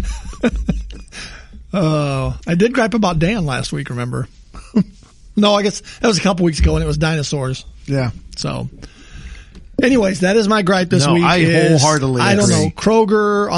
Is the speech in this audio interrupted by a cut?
no; 0 cuts

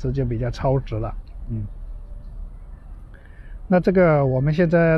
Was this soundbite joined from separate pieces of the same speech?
no; 0 cuts

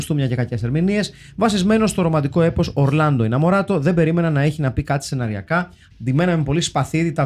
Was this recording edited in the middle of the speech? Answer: yes; 1 cut; at 5.9 s

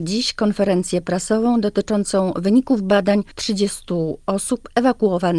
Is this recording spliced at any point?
yes; 1 cut; at 3.3 s

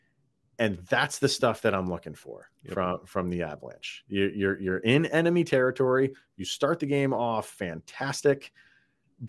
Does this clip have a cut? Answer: no; 0 cuts

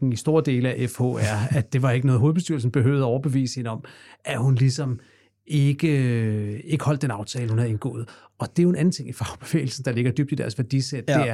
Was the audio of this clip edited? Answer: no; 0 cuts

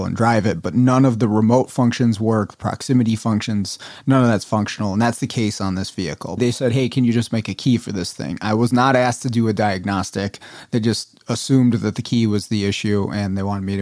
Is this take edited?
yes; 1 cut; at 6.4 s

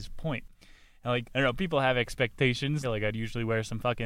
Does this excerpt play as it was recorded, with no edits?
no; 2 cuts; at 1.2 s, 2.8 s

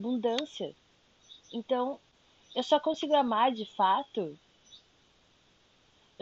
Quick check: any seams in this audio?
yes; 1 cut; at 1.4 s

